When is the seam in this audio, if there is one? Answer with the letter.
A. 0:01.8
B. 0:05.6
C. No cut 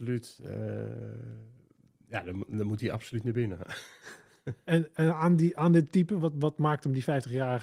C